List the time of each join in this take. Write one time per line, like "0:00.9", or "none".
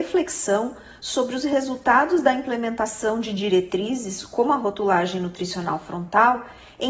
none